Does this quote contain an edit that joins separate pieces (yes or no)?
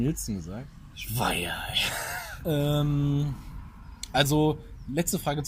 yes